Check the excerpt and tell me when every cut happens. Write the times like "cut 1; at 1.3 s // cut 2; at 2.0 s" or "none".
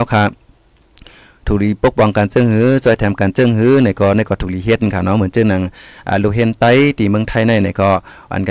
none